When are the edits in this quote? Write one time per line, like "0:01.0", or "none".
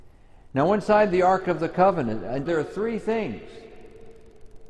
0:02.5